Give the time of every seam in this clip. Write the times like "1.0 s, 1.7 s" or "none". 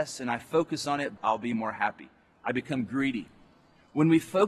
1.2 s